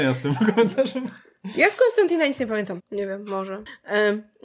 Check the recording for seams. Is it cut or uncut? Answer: cut